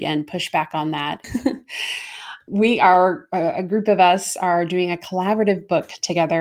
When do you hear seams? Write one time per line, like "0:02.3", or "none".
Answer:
0:01.2
0:02.5